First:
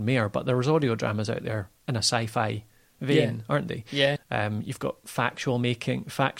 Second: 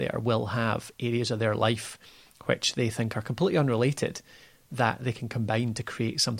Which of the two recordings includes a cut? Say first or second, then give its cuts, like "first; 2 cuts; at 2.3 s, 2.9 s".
first; 1 cut; at 4.2 s